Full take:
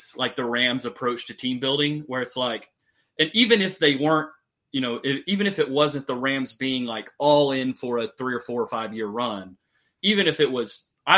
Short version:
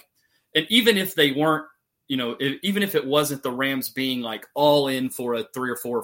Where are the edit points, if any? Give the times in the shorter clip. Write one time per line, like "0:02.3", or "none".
none